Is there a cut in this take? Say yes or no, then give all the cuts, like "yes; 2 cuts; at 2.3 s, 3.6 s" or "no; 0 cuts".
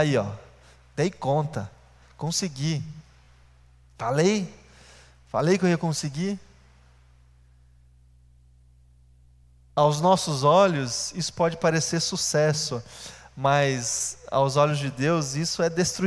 no; 0 cuts